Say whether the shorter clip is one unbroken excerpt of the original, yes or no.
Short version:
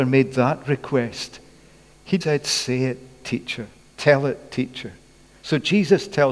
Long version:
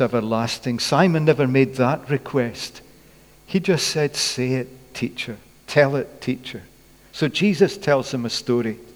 no